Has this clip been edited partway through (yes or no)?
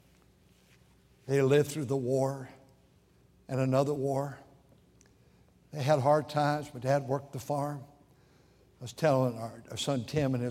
no